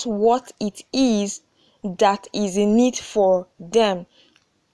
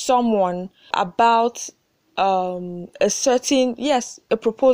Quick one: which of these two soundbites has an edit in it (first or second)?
second